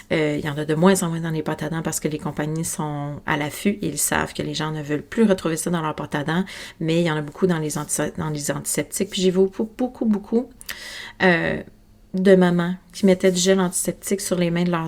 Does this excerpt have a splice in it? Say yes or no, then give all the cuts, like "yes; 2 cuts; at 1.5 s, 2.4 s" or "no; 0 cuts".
no; 0 cuts